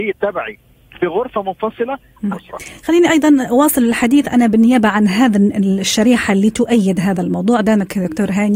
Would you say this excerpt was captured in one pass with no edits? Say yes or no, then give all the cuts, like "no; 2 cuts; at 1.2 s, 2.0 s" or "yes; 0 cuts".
no; 1 cut; at 2.3 s